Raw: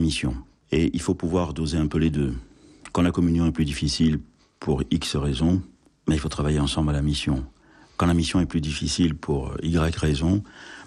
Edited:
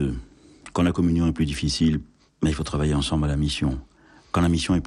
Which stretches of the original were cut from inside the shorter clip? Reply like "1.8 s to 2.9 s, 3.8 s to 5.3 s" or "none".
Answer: 4.5 s to 5.9 s

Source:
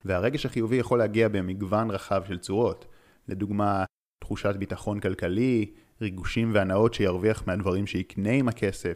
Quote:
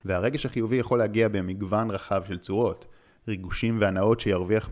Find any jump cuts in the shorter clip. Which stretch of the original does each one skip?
3.2 s to 5.9 s

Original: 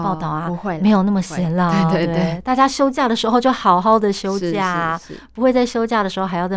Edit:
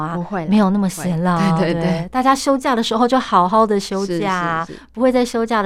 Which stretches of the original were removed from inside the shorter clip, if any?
5.0 s to 5.1 s

